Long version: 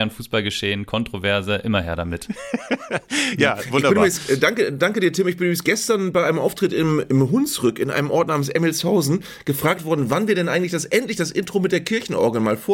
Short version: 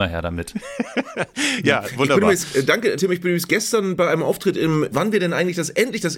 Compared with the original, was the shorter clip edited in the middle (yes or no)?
yes